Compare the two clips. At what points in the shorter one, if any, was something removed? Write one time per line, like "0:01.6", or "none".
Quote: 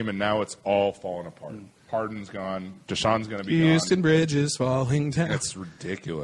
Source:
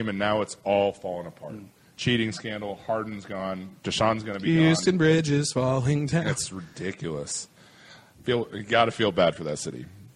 0:01.9